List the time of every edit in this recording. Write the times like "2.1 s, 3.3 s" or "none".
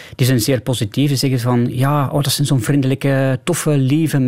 none